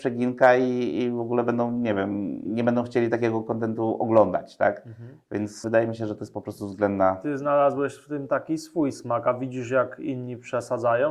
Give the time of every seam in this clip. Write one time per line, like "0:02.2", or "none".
0:02.4